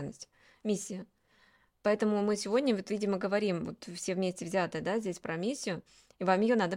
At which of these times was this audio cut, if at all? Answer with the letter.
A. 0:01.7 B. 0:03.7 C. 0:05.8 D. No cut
D